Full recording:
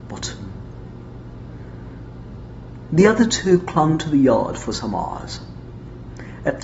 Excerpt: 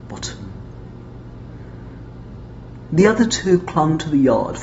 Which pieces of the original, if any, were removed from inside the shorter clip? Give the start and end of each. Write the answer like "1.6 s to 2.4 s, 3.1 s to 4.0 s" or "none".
none